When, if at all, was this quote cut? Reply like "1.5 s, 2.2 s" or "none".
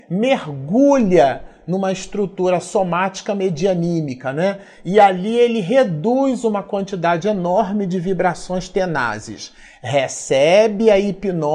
none